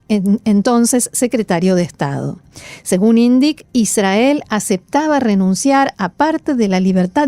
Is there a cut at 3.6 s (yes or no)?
yes